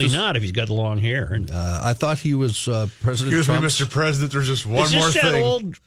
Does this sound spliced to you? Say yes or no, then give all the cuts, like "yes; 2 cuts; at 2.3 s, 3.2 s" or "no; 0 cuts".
no; 0 cuts